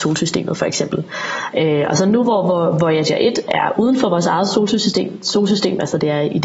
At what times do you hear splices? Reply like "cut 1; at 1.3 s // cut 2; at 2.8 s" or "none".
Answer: none